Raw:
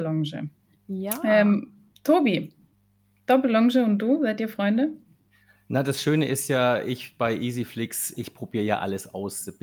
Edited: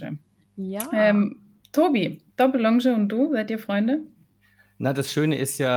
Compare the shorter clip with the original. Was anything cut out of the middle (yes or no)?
yes